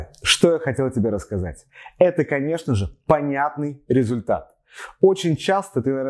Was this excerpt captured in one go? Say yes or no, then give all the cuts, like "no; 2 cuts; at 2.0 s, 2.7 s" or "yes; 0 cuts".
yes; 0 cuts